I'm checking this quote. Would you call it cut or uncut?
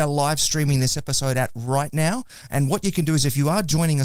cut